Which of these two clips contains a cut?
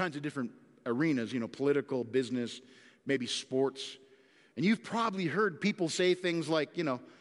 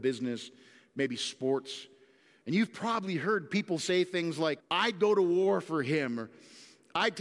second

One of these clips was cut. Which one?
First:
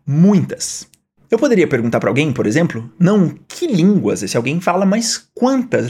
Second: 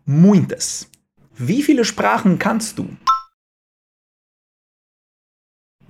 second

